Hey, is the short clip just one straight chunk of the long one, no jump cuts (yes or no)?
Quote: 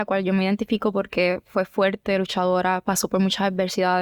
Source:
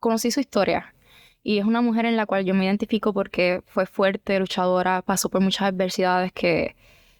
yes